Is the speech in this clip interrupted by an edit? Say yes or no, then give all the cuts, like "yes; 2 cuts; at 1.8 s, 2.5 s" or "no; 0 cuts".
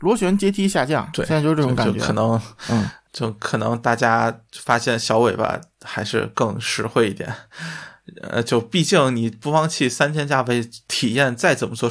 no; 0 cuts